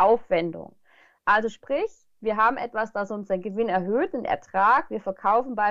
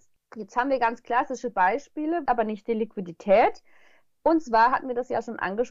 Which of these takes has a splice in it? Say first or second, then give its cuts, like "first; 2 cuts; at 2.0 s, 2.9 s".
second; 1 cut; at 2.3 s